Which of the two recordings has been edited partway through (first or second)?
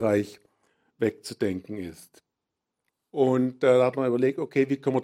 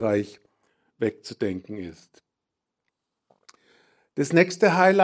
first